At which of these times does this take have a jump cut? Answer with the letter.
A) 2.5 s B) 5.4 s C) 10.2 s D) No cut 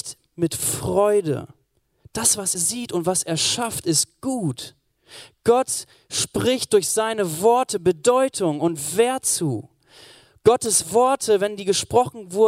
A